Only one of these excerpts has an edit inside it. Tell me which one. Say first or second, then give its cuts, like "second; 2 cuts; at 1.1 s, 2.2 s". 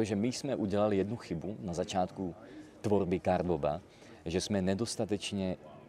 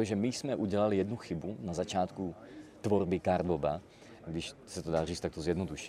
second; 1 cut; at 4.2 s